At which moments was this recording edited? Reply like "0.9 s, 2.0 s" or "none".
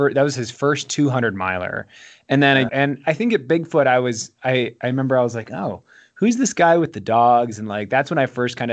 2.7 s